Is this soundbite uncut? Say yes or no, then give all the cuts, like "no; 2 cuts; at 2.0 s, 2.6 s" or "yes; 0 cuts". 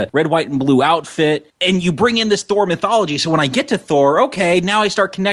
yes; 0 cuts